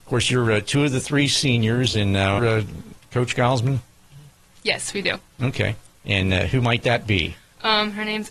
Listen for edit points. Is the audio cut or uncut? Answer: cut